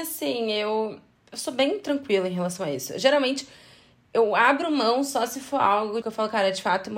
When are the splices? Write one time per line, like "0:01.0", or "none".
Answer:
0:01.2
0:06.0

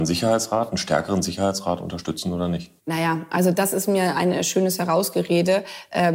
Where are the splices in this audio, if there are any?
0:02.8

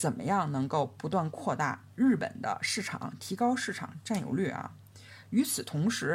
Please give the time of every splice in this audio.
0:01.9

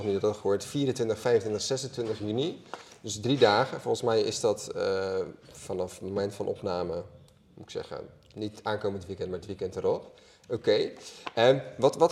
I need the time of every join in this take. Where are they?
none

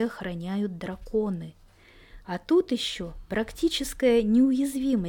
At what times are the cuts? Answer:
0:02.2

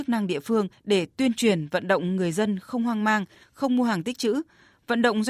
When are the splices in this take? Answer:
none

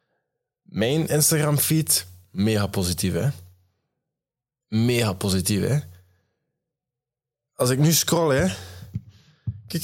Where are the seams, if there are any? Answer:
none

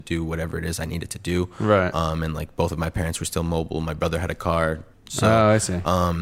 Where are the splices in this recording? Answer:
0:04.9

